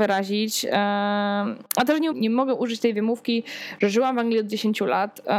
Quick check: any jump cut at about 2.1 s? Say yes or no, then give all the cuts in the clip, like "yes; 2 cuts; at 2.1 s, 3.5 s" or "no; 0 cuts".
yes; 1 cut; at 2.1 s